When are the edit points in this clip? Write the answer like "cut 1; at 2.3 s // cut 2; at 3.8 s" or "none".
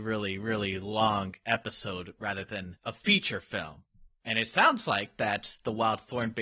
none